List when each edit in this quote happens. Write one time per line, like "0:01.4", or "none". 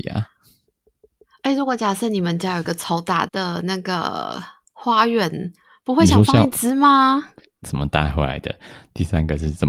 0:03.3
0:07.6